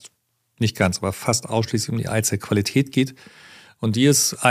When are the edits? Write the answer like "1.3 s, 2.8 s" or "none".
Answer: none

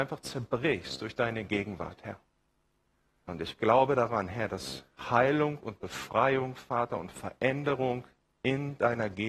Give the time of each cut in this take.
3.3 s

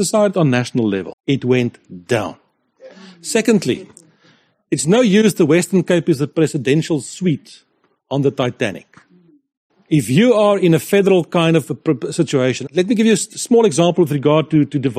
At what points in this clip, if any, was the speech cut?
1.1 s, 9.7 s, 12.7 s

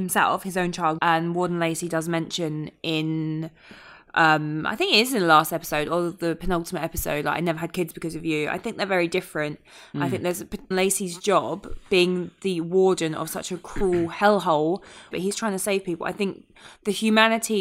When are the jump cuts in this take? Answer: 1.0 s, 10.7 s, 15.1 s

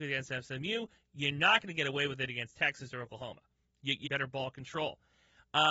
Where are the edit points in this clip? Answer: 4.0 s

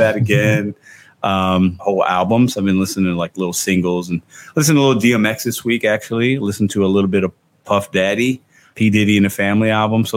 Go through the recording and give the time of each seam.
1.8 s, 8.7 s

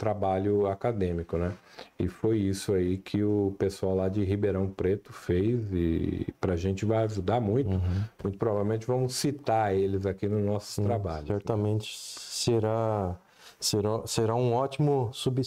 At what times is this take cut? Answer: none

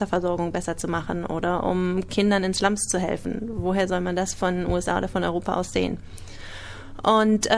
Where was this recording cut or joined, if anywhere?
none

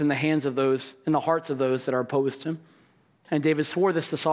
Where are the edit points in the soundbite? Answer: 3.2 s

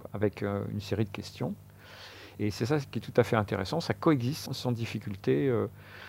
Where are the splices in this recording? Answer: 2.3 s, 4.5 s

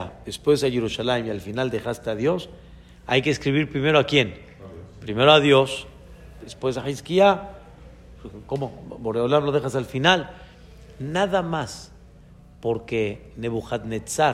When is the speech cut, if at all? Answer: 6.4 s

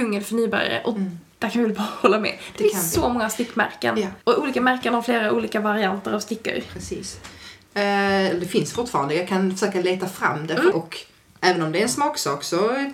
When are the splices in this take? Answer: 4.2 s, 7.7 s, 10.7 s

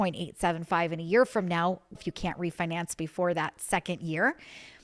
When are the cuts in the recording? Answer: 1.9 s

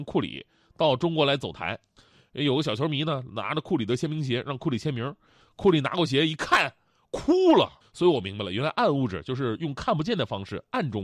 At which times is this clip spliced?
7.8 s

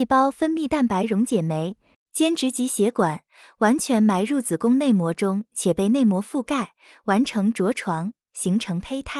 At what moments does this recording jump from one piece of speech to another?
1.9 s

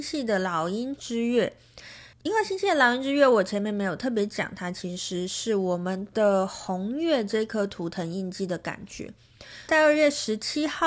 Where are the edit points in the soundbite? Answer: 2.1 s, 9.7 s

